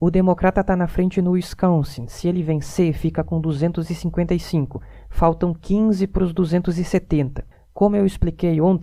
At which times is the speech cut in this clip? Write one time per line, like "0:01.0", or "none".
0:07.5